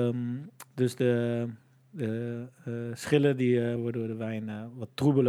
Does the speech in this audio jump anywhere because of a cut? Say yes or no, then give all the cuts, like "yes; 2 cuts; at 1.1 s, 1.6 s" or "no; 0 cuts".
yes; 1 cut; at 3.8 s